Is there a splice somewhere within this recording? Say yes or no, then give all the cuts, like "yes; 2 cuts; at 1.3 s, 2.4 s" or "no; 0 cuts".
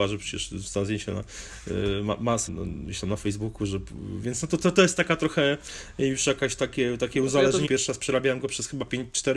yes; 2 cuts; at 2.5 s, 7.7 s